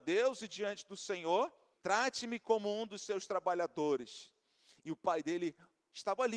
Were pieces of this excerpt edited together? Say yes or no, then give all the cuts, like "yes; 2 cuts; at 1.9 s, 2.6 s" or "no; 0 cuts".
yes; 2 cuts; at 1.7 s, 4.7 s